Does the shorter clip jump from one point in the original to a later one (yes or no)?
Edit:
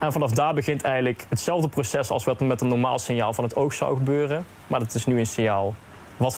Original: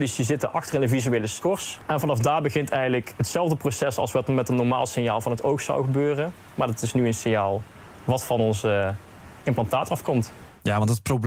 no